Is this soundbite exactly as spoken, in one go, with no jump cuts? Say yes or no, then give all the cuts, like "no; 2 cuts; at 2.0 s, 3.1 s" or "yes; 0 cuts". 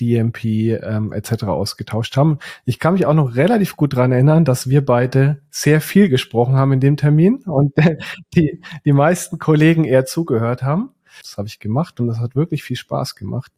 no; 1 cut; at 11.2 s